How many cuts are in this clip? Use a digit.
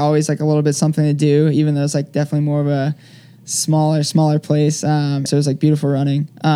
1